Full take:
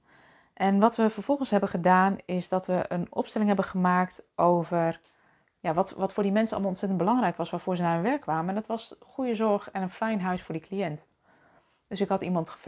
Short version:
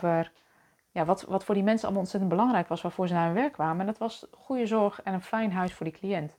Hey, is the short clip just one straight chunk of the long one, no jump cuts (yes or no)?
yes